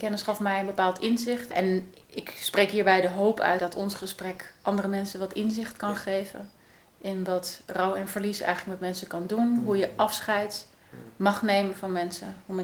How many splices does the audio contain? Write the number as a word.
zero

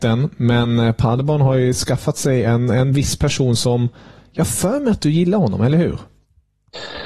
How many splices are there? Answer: zero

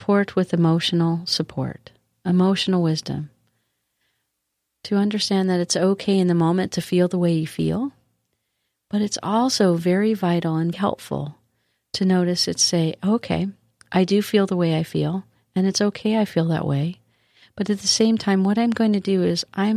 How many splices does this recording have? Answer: one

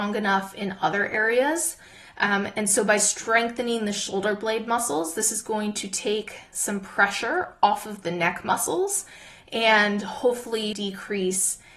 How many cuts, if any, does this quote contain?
one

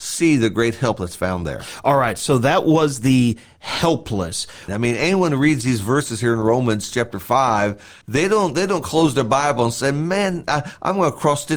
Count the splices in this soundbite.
two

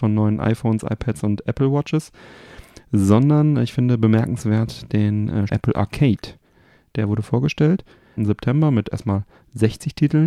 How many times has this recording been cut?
two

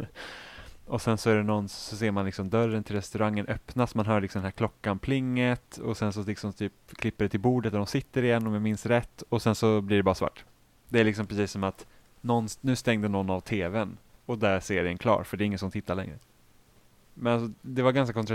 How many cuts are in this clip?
two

